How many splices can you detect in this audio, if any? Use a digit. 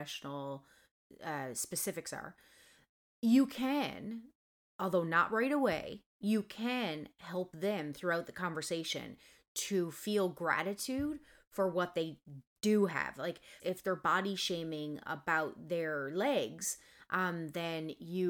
1